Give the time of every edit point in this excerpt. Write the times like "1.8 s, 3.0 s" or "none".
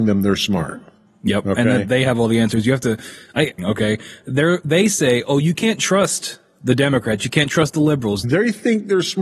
3.6 s, 8.2 s